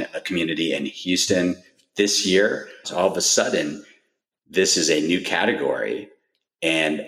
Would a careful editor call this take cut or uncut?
cut